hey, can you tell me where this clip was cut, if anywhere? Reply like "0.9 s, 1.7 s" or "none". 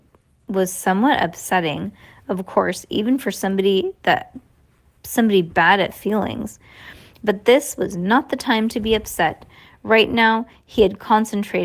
none